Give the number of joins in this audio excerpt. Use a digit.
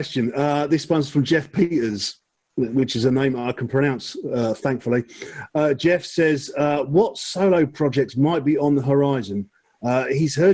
0